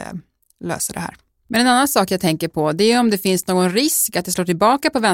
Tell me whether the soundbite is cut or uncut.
uncut